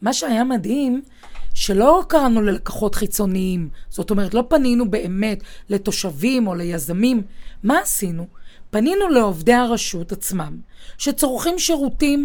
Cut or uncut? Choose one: uncut